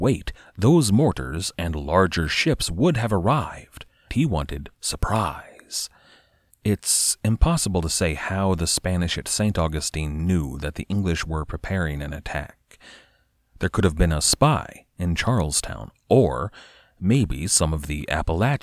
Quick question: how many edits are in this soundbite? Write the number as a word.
two